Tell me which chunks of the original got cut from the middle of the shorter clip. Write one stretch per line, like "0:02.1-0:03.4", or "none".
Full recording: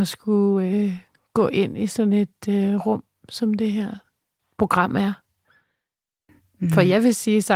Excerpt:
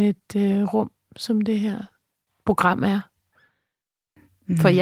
none